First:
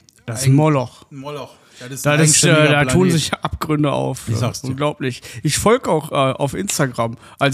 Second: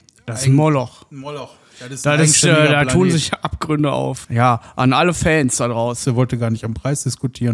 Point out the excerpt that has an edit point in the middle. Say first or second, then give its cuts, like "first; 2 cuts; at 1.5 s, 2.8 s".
second; 2 cuts; at 4.2 s, 6.0 s